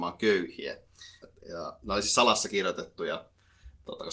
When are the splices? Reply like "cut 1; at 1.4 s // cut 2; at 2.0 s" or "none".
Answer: cut 1; at 1.2 s

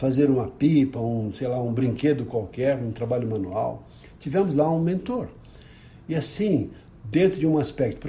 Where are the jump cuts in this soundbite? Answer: none

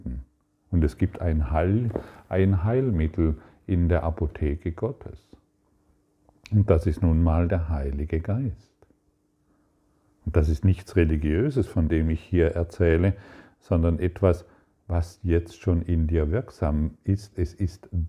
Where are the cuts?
none

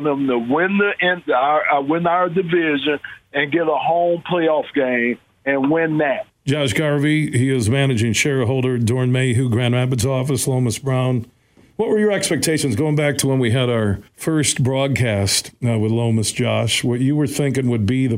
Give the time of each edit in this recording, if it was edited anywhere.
cut 1; at 6.3 s // cut 2; at 14.1 s

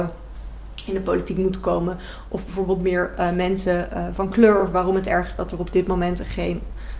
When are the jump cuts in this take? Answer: none

